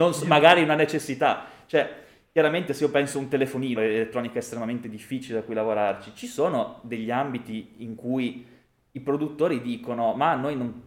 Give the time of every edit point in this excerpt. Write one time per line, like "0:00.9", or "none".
0:03.8